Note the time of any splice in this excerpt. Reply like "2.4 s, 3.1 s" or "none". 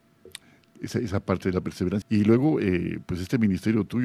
2.0 s